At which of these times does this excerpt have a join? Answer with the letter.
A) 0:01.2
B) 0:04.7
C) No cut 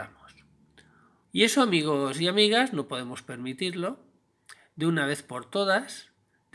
A